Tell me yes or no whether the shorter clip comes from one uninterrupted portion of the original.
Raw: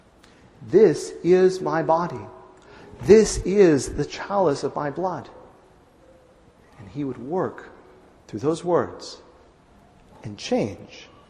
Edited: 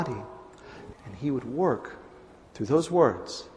no